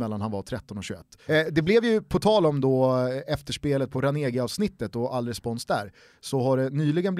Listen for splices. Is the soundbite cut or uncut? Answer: cut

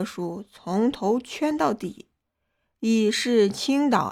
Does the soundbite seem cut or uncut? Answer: uncut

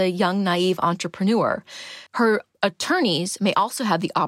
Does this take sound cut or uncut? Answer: cut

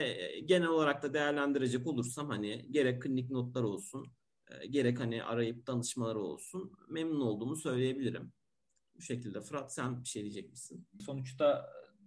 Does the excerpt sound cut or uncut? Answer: cut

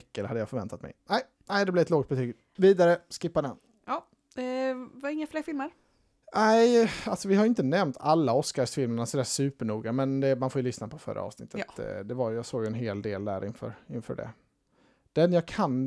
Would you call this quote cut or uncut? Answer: cut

